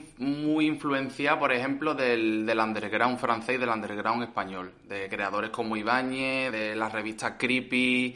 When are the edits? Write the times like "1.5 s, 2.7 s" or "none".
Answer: 6.5 s

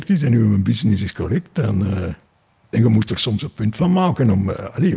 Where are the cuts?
2.7 s

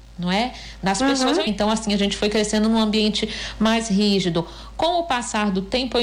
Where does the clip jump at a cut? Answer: 1.5 s

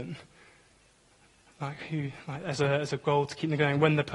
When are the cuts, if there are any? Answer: none

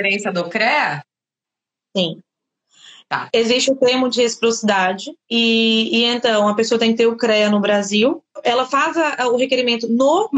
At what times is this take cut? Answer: none

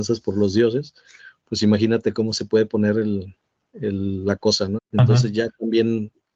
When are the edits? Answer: 4.8 s

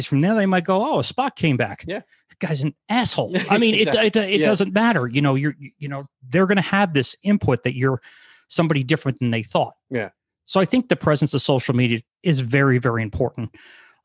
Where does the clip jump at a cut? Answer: 12.0 s

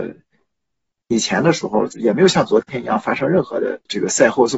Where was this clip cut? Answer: 1.9 s

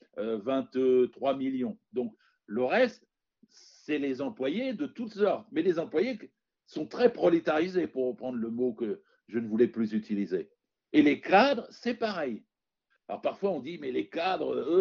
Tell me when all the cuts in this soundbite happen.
none

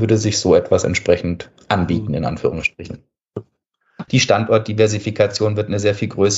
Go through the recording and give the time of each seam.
4.1 s

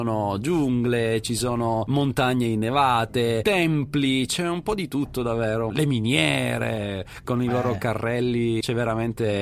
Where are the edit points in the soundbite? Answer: 3.4 s, 5.7 s

